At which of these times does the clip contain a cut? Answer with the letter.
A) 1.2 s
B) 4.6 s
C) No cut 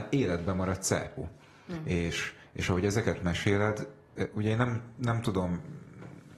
A